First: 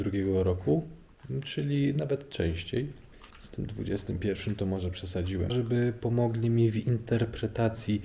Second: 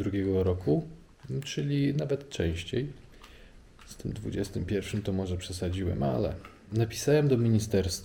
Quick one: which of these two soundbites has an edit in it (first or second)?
first